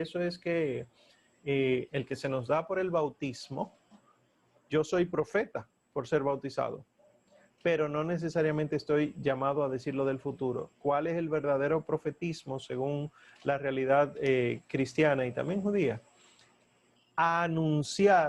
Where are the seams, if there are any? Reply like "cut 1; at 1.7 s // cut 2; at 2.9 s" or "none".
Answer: cut 1; at 1.9 s // cut 2; at 10.7 s